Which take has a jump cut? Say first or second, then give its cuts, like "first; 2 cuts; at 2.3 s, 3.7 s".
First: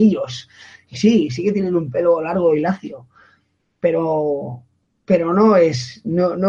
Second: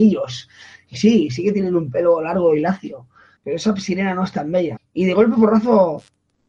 second; 2 cuts; at 3.4 s, 4.8 s